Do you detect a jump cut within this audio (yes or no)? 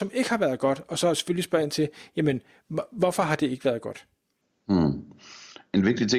no